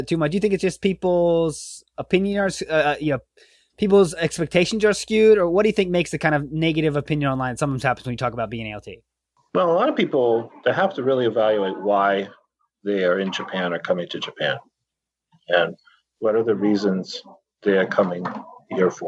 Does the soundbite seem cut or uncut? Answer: uncut